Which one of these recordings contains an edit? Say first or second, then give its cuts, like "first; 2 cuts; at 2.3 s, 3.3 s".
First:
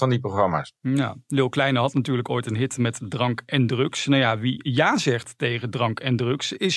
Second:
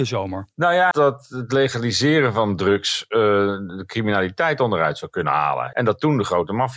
second; 2 cuts; at 0.9 s, 5.7 s